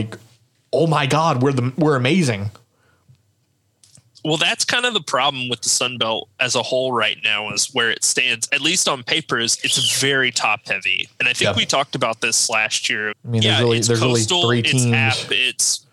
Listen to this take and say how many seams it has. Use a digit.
1